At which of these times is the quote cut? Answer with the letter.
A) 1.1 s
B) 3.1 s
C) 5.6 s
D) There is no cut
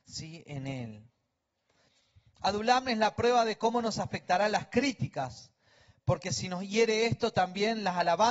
D